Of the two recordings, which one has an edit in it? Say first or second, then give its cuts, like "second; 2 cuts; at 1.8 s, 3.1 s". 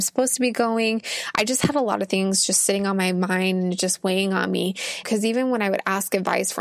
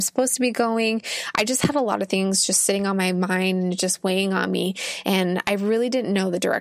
first; 1 cut; at 5.0 s